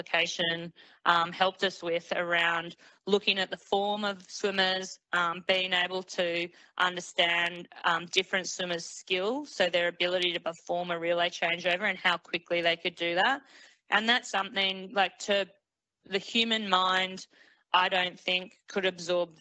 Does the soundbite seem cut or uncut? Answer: cut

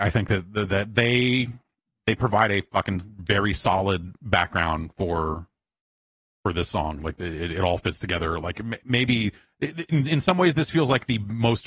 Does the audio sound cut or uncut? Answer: uncut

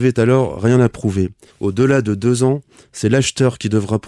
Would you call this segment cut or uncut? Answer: cut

